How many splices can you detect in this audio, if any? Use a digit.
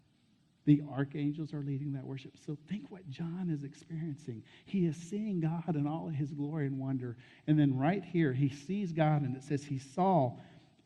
0